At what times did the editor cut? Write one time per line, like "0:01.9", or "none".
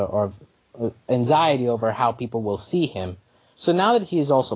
none